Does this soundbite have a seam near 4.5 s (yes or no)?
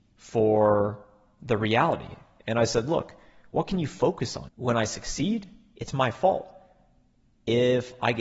yes